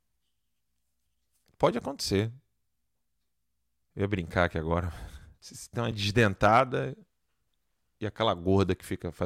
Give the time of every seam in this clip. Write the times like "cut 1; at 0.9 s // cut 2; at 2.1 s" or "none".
cut 1; at 3.8 s // cut 2; at 5.4 s